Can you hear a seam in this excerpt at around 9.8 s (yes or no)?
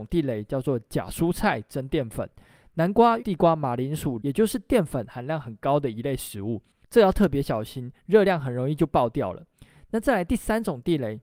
no